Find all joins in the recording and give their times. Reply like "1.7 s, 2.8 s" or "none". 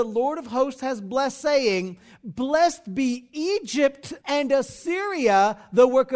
4.2 s